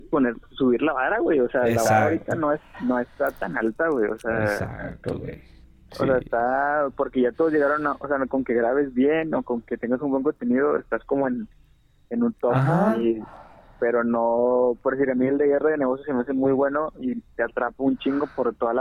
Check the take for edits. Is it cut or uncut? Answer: uncut